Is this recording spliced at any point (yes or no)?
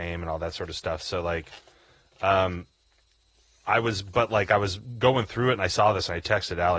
no